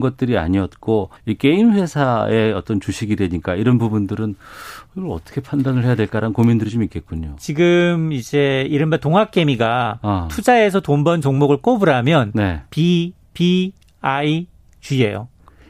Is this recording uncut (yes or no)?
no